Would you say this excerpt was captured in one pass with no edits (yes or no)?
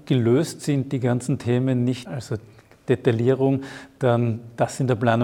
no